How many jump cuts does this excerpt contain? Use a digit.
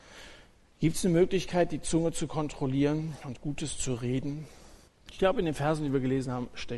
1